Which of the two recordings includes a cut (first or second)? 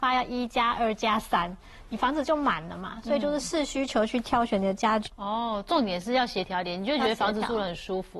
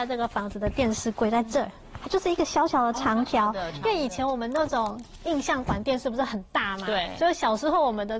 first